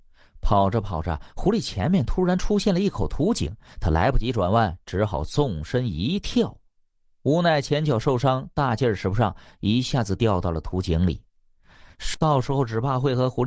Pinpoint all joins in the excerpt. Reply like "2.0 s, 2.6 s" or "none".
12.1 s